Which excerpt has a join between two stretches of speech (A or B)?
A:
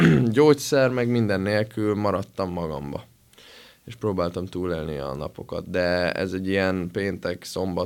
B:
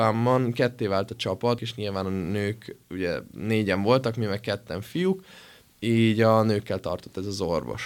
B